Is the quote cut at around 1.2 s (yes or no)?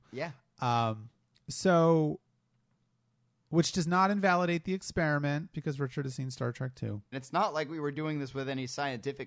no